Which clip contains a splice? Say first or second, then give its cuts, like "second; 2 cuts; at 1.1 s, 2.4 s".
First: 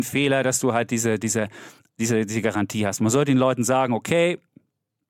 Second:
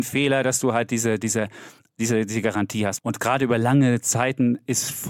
second; 1 cut; at 3.0 s